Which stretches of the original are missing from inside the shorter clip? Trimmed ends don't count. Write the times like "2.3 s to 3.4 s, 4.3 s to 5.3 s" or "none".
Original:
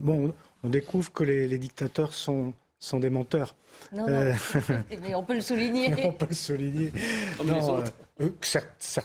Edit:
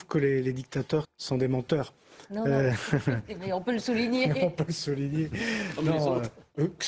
2.1 s to 2.7 s